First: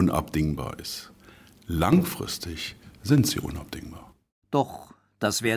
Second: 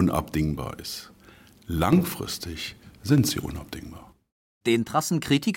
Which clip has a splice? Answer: first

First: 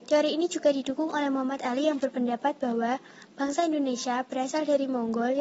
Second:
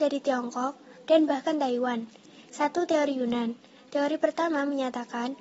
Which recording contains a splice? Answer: second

